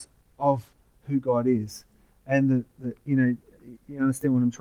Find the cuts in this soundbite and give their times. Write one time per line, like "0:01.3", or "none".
none